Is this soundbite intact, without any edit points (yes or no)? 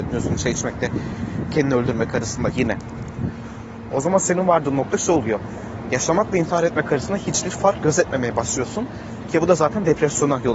no